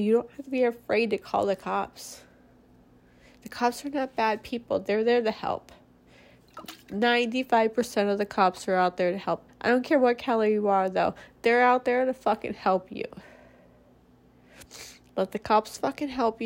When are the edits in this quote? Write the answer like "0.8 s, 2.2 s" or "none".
9.5 s